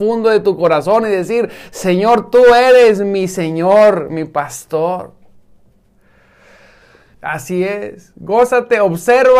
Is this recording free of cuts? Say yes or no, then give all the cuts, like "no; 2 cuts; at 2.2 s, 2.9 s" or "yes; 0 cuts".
no; 1 cut; at 7.1 s